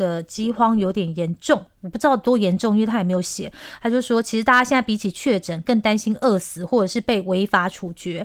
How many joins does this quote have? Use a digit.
0